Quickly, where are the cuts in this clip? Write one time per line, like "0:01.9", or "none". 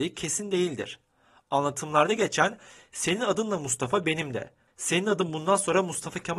0:04.7